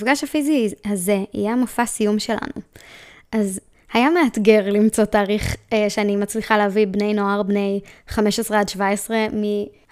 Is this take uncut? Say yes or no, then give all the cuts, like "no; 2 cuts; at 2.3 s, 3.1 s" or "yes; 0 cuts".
yes; 0 cuts